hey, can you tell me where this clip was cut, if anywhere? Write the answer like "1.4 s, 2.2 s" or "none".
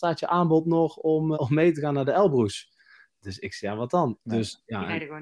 1.3 s, 4.1 s